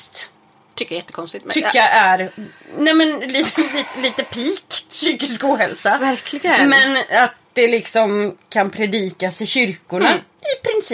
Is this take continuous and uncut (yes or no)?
yes